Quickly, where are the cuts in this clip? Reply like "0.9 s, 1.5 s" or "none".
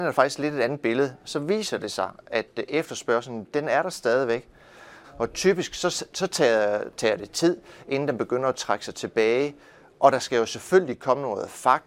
5.0 s